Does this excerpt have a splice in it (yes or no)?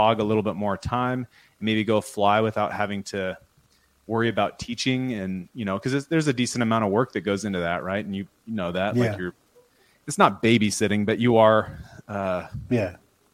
no